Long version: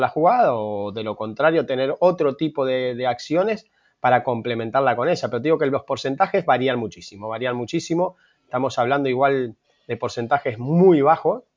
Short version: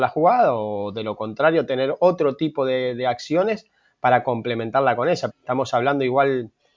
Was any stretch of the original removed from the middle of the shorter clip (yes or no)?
yes